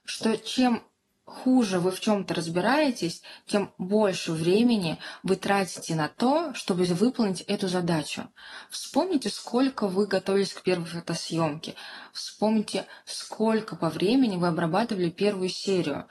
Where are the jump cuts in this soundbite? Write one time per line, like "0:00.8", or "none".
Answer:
none